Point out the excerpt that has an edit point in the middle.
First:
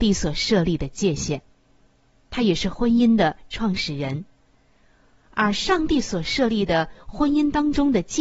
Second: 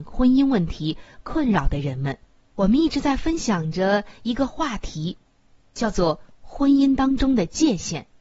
second; 1 cut; at 2.5 s

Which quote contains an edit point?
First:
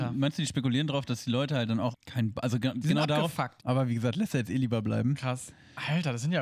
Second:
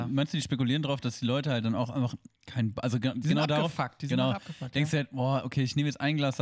first; 2 cuts; at 1.9 s, 3.6 s

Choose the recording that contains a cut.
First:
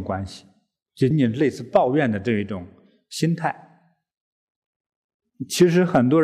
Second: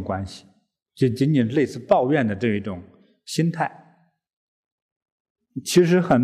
first; 1 cut; at 1.1 s

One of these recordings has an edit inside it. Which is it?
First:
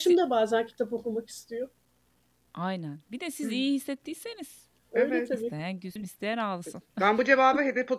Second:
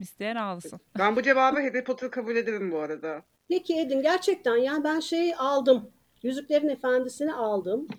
first; 1 cut; at 6.0 s

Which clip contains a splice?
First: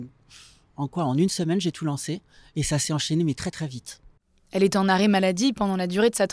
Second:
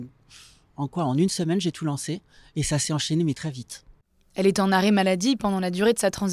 second; 1 cut; at 3.3 s

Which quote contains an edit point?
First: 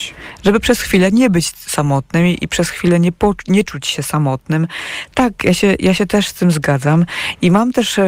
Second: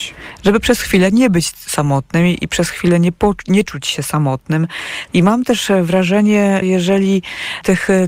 second; 2 cuts; at 5.1 s, 6.6 s

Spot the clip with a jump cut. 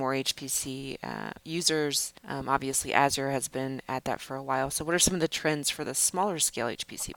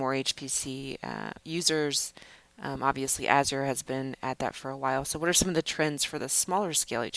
first; 1 cut; at 2.2 s

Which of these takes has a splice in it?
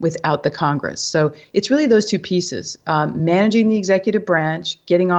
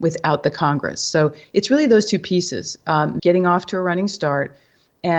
second; 1 cut; at 3.2 s

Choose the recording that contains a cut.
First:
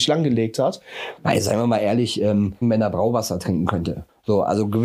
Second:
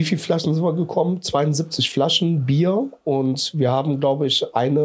first; 2 cuts; at 1.2 s, 2.6 s

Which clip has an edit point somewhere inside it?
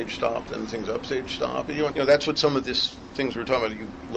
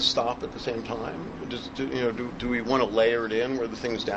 first; 1 cut; at 1.9 s

